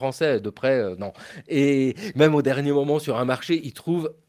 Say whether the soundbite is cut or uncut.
uncut